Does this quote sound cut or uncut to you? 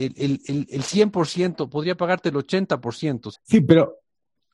cut